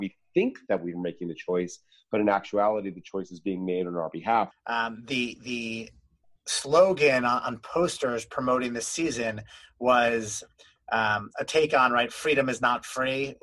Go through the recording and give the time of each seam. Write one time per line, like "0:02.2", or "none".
0:04.5